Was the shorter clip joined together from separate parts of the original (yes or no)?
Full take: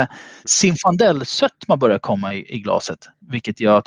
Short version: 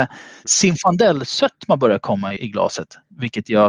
yes